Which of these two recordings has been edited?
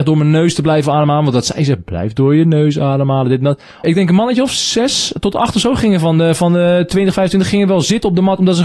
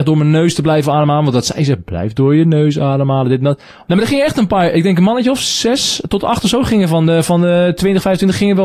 first; 1 cut; at 3.8 s

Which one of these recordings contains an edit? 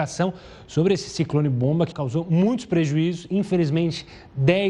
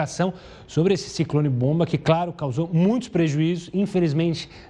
first; 1 cut; at 1.9 s

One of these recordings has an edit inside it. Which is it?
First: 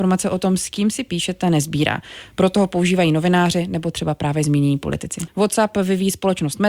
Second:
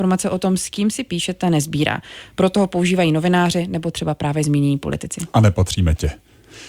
first; 1 cut; at 5.3 s

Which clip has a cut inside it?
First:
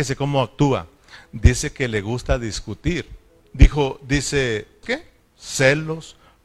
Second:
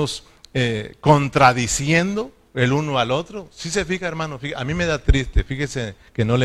first; 2 cuts; at 3.4 s, 4.8 s

